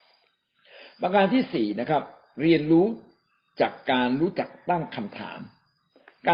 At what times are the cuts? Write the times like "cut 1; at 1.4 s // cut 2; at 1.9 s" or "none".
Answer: none